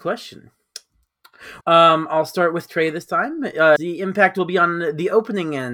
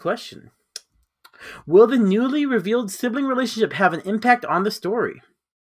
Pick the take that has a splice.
first; 2 cuts; at 1.6 s, 3.8 s

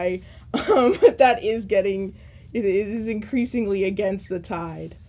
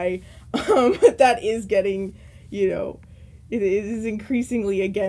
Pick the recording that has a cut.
first; 1 cut; at 2.5 s

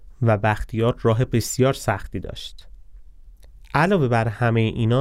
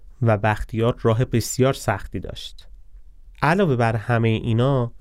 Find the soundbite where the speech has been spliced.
second; 1 cut; at 3.3 s

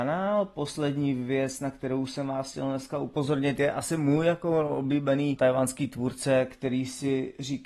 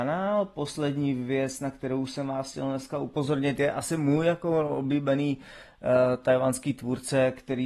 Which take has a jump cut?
first; 1 cut; at 5.4 s

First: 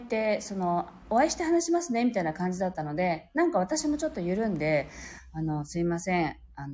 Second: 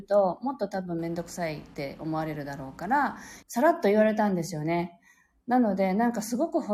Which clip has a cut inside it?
second; 1 cut; at 3.4 s

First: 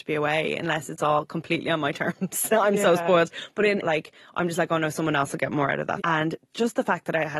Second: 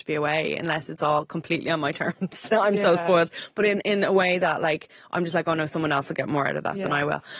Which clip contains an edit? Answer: first; 2 cuts; at 3.8 s, 6.0 s

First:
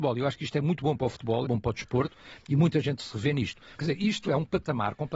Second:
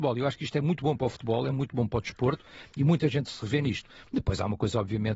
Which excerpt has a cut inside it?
first; 2 cuts; at 1.4 s, 3.8 s

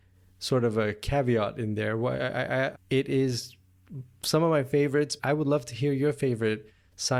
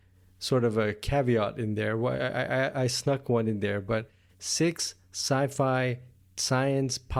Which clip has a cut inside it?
first; 2 cuts; at 2.7 s, 5.2 s

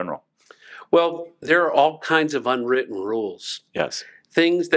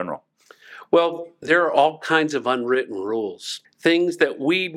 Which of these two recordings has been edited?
second; 1 cut; at 3.6 s

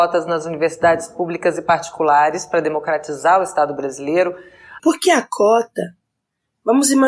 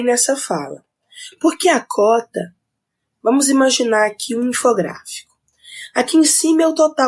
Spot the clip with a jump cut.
first; 1 cut; at 4.8 s

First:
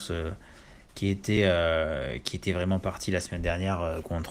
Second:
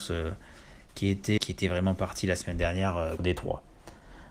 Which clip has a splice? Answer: second; 2 cuts; at 1.4 s, 3.2 s

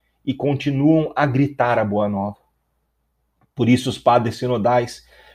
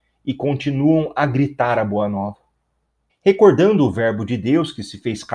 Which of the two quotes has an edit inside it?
second; 1 cut; at 3.1 s

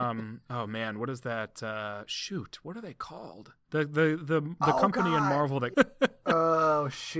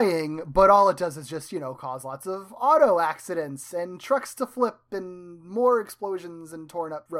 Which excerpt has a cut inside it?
first; 2 cuts; at 3.6 s, 5.7 s

